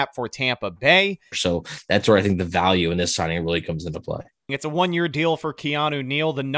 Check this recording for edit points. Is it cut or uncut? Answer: cut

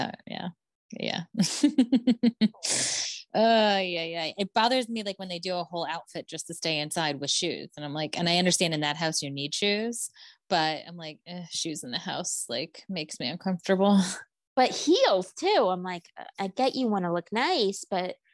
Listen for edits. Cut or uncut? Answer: uncut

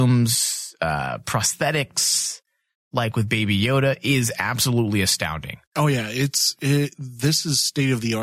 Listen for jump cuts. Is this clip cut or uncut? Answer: cut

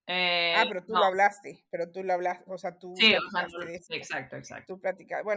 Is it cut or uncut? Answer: uncut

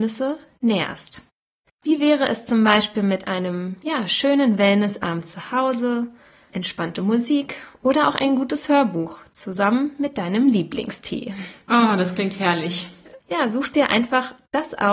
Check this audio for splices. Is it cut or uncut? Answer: cut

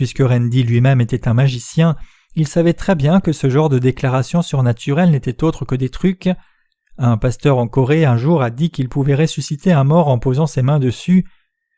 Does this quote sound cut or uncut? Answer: uncut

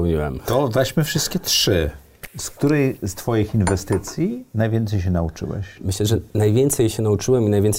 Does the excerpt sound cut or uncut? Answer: cut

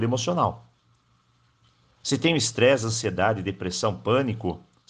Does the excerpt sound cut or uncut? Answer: uncut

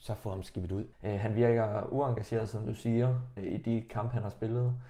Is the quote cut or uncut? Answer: cut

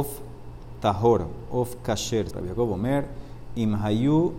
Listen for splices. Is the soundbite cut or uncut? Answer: cut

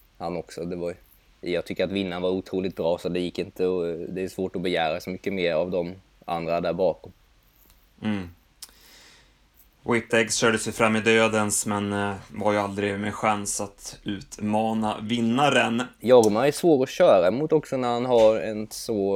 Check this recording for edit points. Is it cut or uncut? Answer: uncut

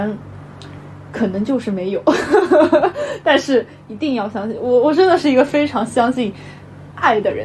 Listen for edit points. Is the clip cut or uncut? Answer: uncut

